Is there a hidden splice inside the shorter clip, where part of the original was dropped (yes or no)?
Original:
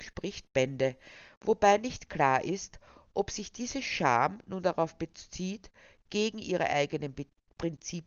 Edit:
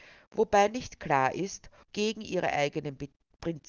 yes